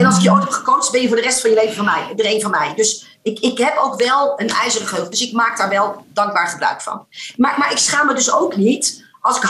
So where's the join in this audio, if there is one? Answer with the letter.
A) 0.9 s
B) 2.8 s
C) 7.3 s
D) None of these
D